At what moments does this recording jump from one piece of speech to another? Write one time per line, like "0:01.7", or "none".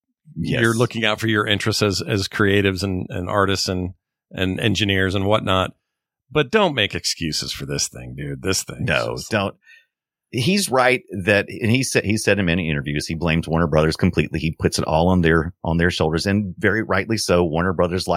none